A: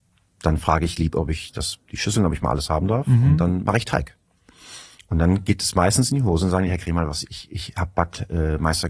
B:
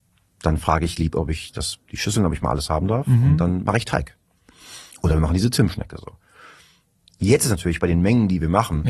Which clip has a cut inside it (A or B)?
B